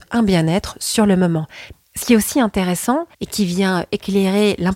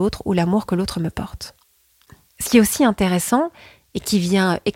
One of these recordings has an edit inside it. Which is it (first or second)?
first